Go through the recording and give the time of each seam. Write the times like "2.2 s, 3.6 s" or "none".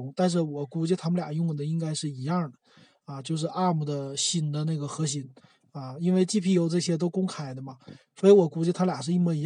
none